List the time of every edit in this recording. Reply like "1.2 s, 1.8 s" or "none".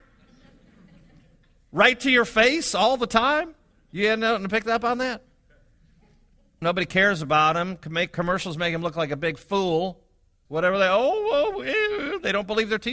6.6 s, 10.5 s